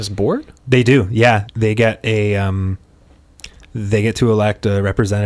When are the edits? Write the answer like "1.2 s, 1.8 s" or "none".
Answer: 1.5 s